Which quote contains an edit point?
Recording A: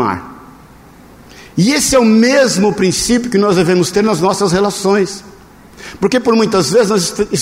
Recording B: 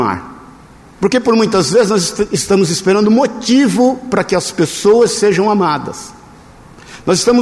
B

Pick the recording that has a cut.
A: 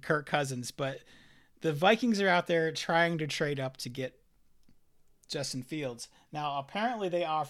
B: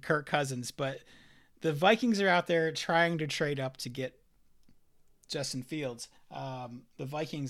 B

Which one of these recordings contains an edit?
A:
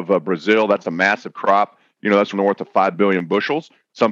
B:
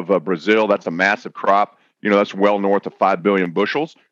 A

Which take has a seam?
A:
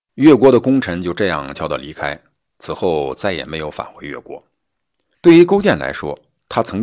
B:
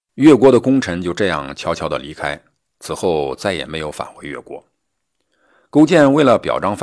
A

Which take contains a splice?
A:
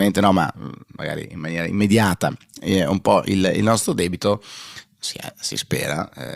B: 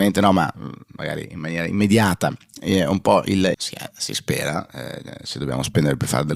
B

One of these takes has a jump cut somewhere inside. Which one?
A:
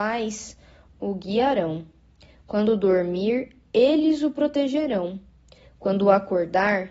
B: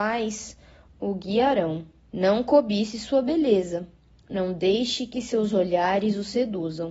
B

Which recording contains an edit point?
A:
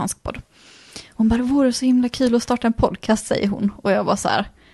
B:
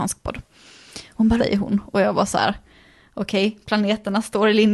B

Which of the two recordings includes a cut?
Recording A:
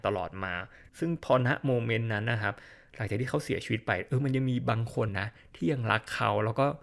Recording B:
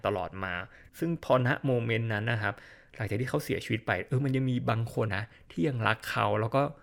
B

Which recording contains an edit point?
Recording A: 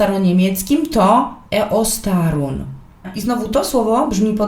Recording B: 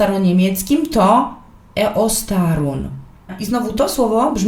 A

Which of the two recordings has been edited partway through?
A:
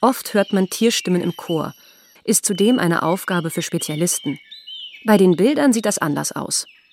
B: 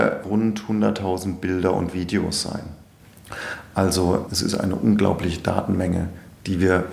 A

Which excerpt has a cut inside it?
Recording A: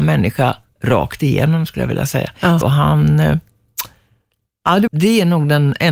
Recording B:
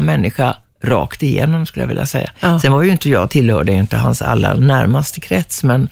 A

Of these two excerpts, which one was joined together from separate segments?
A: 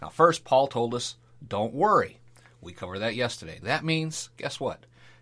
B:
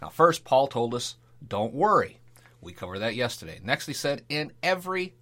A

